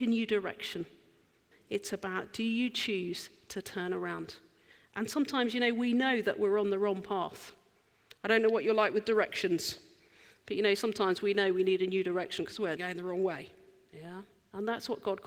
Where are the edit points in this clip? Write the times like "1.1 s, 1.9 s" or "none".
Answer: 1.5 s, 12.8 s